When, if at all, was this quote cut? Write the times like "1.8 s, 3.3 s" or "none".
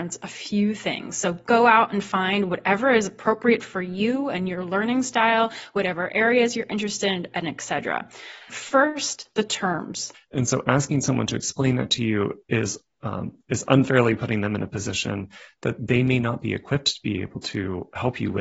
8.5 s, 10.1 s

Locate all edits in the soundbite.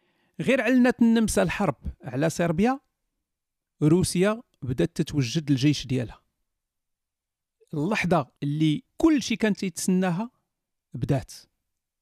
8.4 s

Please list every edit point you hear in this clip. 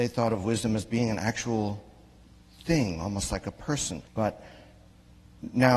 4.1 s

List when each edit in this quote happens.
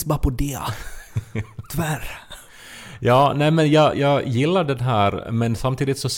3.9 s

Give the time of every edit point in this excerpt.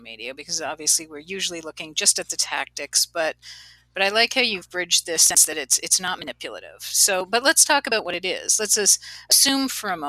none

